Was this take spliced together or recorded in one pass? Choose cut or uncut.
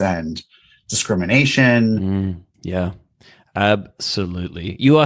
cut